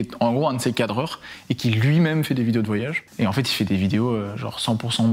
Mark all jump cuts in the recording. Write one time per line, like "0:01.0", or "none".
0:03.1